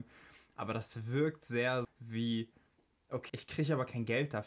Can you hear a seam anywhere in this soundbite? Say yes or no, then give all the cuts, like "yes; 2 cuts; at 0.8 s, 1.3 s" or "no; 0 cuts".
yes; 2 cuts; at 1.8 s, 3.3 s